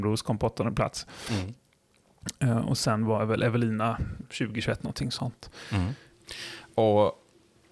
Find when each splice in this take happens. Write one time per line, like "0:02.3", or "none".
0:04.2